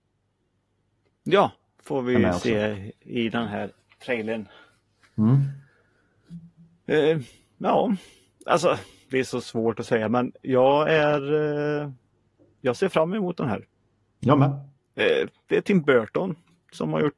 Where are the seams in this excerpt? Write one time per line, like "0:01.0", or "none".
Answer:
none